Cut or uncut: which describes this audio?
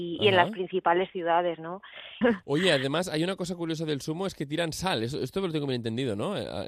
cut